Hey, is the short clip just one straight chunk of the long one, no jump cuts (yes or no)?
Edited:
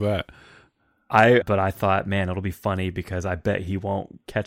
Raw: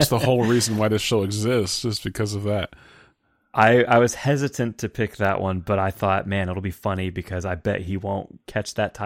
no